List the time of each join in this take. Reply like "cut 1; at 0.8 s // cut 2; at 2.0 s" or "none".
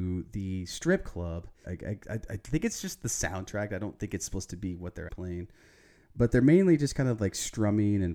cut 1; at 1.6 s // cut 2; at 5.1 s